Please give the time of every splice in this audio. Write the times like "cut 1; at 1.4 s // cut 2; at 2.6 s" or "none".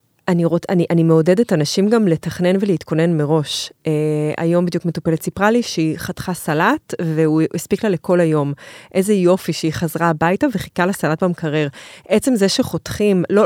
none

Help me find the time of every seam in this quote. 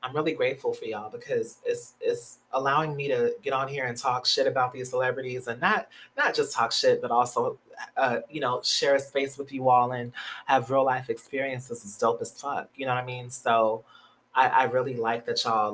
none

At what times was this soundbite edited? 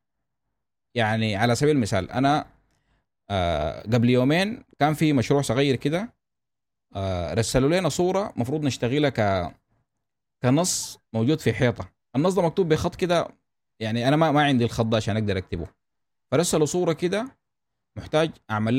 none

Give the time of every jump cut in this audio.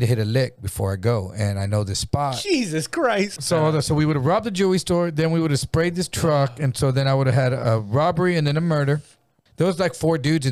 cut 1; at 3.4 s // cut 2; at 9.5 s

